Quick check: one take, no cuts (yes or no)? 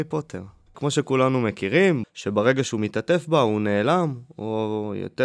no